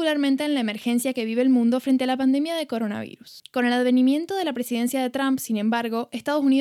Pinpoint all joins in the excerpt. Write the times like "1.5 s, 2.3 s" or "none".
3.4 s